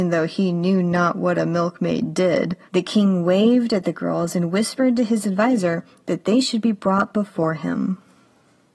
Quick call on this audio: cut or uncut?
cut